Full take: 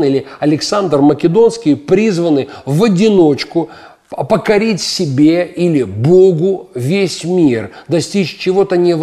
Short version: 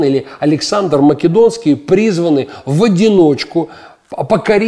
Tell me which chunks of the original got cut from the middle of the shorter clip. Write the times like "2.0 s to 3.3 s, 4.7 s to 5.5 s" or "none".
none